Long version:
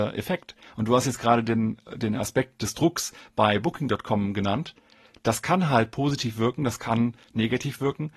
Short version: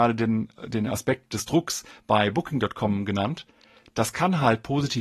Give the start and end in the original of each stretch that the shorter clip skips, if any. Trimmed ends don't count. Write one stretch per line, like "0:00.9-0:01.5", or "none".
none

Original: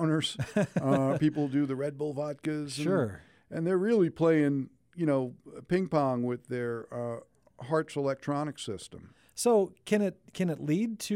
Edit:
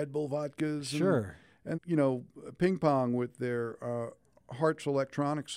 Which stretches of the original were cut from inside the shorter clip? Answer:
0:03.6-0:04.8

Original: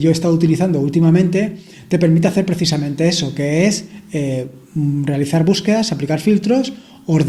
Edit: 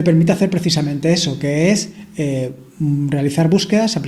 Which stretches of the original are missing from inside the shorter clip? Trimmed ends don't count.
none

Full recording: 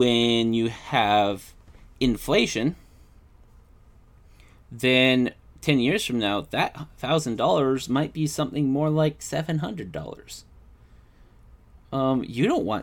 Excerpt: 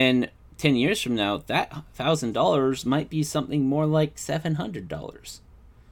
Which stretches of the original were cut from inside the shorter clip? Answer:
none

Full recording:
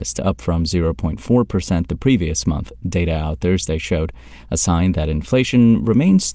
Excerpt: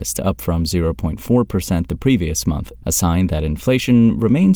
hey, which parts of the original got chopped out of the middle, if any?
0:02.8-0:04.5

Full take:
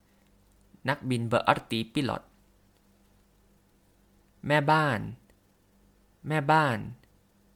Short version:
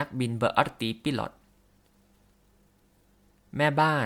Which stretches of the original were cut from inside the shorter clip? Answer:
none

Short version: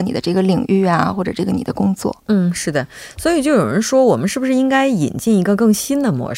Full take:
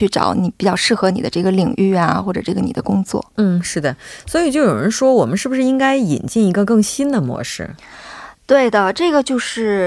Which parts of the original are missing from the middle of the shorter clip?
none

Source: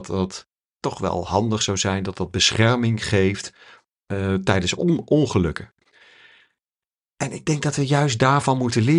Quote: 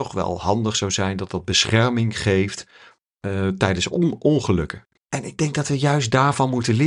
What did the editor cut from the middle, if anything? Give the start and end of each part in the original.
0:05.8-0:07.0

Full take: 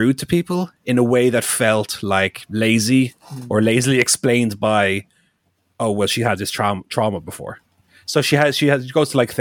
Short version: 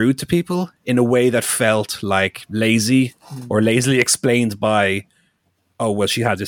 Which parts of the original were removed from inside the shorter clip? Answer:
none

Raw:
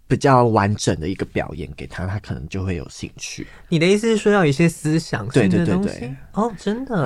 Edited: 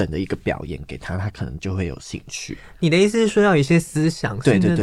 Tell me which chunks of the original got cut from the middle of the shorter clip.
none

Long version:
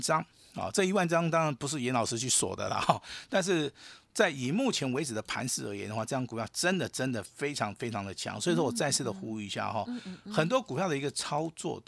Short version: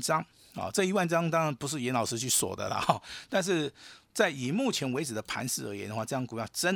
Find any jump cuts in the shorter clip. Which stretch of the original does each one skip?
none

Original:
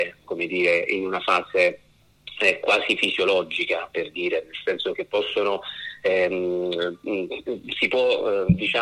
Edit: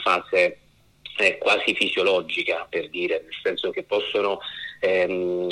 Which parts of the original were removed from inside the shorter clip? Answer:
none

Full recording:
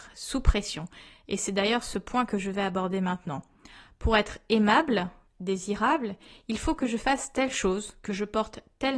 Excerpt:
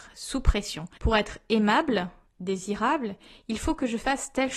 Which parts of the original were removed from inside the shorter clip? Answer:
0:01.0-0:04.0

